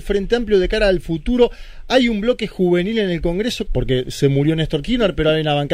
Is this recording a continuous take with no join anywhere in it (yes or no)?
no